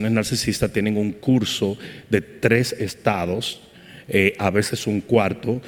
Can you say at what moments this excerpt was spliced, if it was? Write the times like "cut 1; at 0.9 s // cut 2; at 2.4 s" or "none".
none